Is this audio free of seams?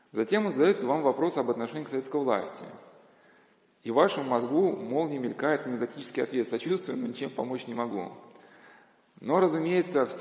yes; 0 cuts

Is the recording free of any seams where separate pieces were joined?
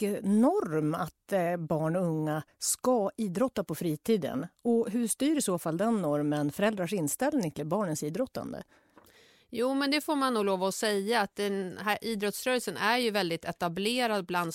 yes; 0 cuts

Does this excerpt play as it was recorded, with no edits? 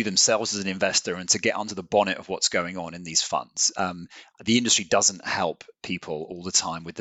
yes; 0 cuts

